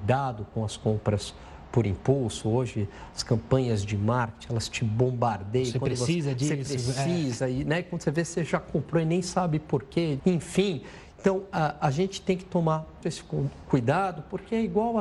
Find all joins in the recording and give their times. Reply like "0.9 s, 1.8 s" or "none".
10.2 s, 13.0 s